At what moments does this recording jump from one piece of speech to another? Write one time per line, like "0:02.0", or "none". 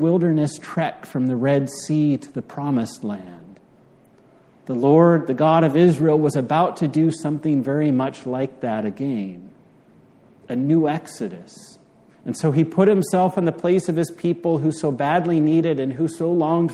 0:12.1

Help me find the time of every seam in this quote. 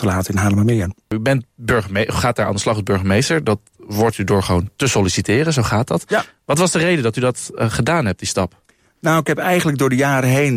none

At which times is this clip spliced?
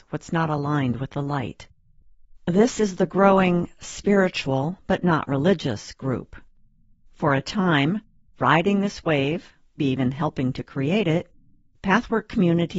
0:09.8

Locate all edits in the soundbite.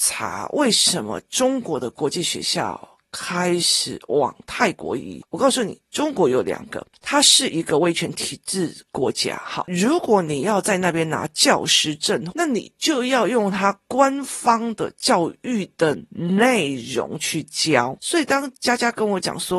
0:09.6
0:12.3
0:18.0

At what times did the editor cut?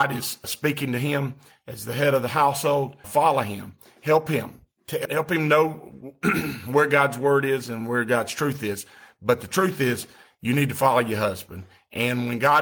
none

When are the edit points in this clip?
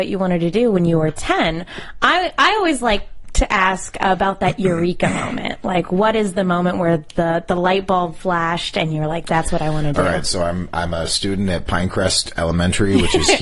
none

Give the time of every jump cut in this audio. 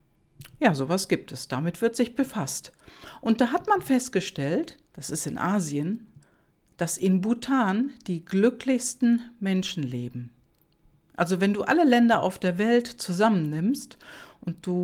0:04.9

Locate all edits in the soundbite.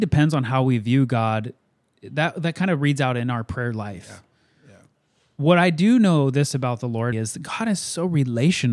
0:07.1

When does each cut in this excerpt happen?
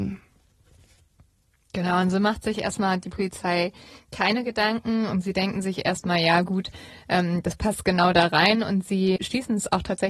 0:09.2

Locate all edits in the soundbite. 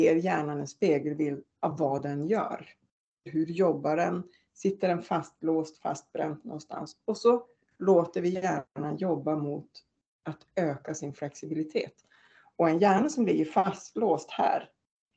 0:03.3

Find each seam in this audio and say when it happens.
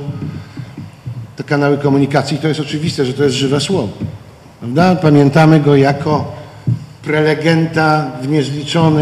none

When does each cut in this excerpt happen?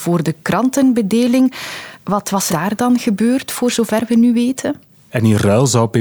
0:02.5
0:05.1

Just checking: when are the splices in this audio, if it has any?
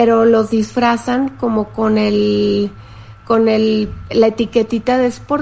none

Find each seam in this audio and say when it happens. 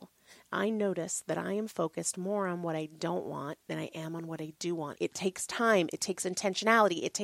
0:04.9

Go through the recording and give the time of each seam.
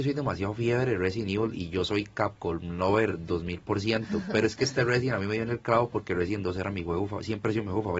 none

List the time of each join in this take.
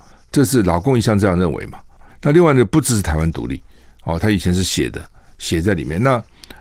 0:02.1

